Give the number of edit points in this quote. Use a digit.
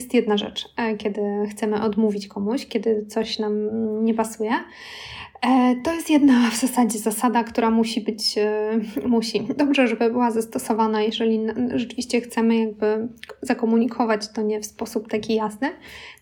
0